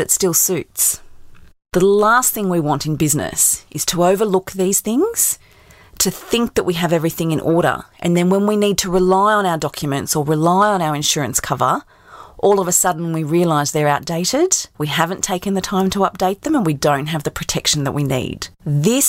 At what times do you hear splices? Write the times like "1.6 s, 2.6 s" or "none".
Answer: none